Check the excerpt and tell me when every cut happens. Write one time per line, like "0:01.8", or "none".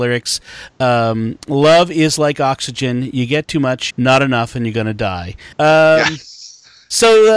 0:03.9
0:05.5